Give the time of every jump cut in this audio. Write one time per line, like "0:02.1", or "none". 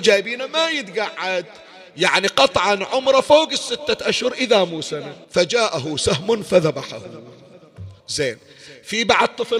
0:05.2
0:08.0